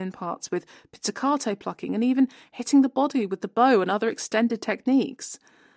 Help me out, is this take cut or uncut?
uncut